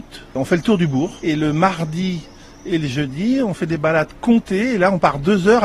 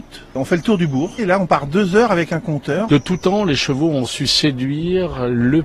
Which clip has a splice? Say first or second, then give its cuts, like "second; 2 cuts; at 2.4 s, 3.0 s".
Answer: second; 2 cuts; at 1.2 s, 2.9 s